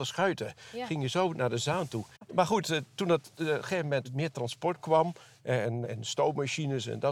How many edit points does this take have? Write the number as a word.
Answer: zero